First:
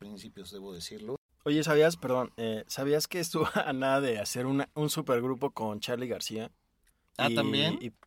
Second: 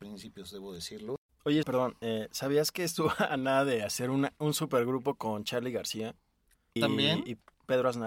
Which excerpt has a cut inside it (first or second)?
second